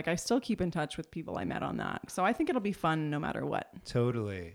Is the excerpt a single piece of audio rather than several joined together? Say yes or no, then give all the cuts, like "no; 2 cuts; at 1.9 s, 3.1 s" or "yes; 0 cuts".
no; 1 cut; at 2.1 s